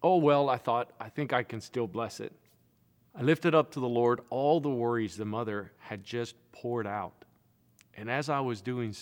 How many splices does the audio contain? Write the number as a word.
one